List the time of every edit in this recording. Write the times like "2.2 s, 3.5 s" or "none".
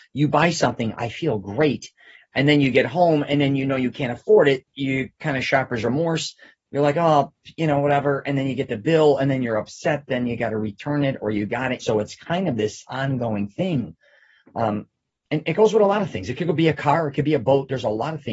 11.8 s